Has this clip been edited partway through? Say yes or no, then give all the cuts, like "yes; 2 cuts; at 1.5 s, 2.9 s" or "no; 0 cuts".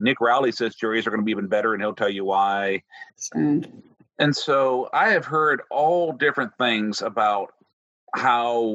yes; 1 cut; at 3.1 s